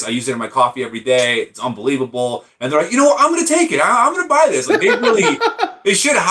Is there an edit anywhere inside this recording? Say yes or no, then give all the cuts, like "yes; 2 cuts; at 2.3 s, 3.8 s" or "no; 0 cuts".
yes; 1 cut; at 4.7 s